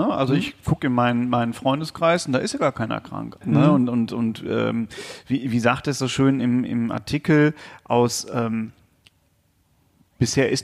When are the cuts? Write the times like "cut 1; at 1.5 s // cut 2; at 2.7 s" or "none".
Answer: cut 1; at 3.4 s